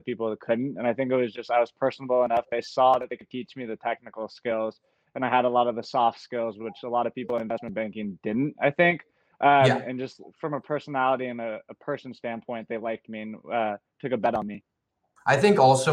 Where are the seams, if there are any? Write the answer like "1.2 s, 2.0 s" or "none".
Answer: none